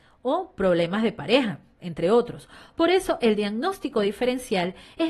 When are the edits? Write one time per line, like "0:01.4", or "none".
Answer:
none